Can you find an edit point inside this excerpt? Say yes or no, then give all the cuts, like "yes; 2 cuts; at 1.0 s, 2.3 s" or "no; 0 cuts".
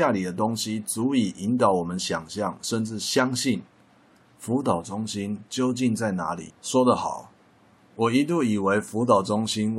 yes; 1 cut; at 6.5 s